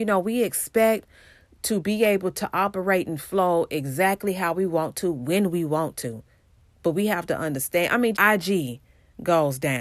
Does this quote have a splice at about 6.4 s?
no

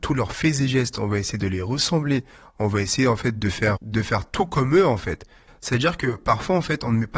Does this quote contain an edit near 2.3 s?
no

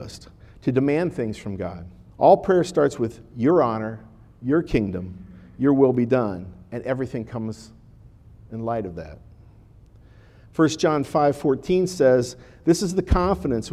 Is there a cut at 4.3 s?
no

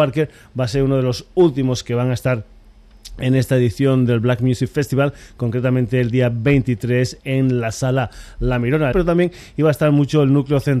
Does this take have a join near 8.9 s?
yes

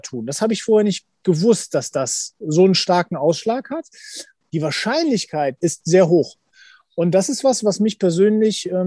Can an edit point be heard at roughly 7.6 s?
no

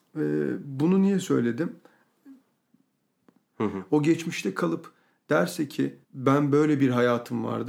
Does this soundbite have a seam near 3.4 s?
yes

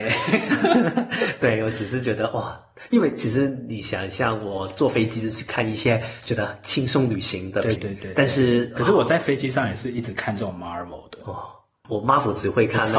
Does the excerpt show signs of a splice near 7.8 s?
yes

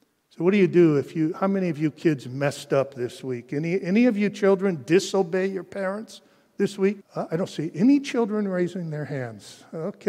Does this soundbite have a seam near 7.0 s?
yes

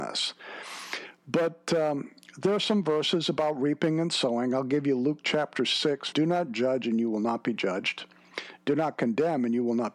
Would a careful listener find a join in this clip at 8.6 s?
no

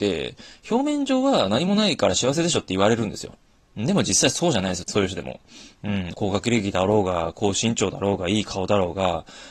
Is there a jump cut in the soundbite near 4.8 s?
yes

